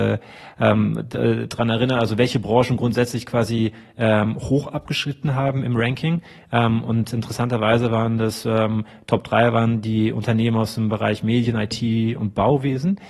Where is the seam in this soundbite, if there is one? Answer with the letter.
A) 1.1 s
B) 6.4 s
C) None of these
C